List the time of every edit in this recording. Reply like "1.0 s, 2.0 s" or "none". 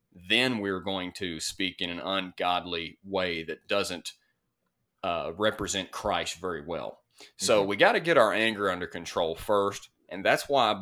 none